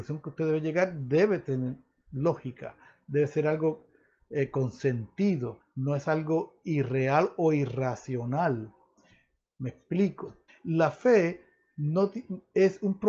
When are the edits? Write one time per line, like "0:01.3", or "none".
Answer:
0:05.6
0:10.5